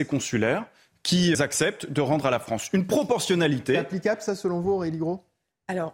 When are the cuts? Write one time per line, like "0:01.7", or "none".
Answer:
0:01.3